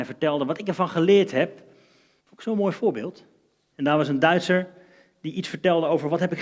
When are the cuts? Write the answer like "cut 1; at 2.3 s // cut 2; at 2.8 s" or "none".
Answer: cut 1; at 2.2 s // cut 2; at 3.7 s